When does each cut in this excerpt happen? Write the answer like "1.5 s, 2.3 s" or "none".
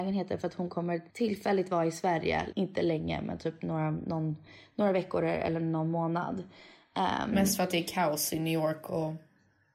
1.1 s, 2.5 s